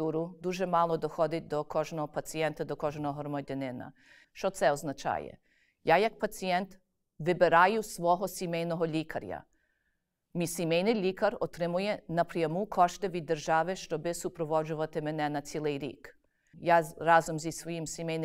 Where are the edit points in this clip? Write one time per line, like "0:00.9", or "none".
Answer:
0:04.2
0:16.5